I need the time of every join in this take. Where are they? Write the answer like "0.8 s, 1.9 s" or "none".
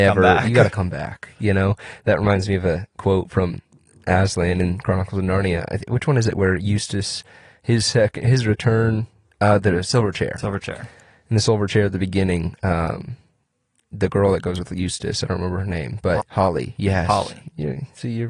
16.2 s

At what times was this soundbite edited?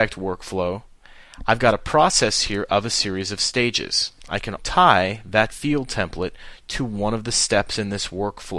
4.6 s

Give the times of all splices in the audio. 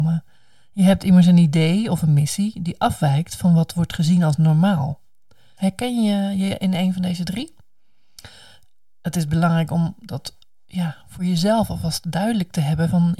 5.6 s

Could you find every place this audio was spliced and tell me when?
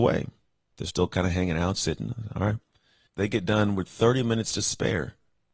3.1 s

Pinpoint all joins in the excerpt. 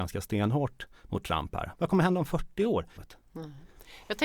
1.7 s, 3.0 s

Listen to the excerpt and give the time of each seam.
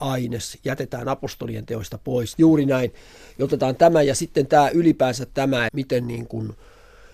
2.3 s, 5.7 s

